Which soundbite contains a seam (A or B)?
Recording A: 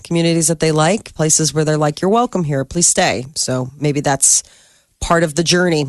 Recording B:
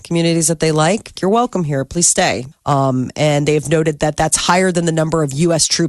B